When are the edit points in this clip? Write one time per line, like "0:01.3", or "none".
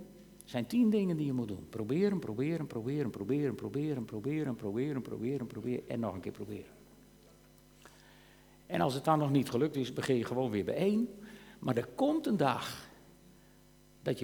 none

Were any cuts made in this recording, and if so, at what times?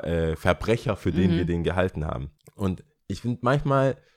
none

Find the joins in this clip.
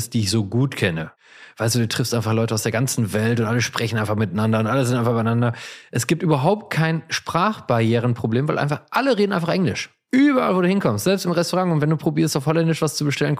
none

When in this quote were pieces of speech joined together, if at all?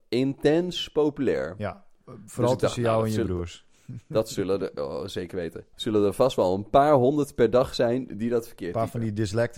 0:05.7

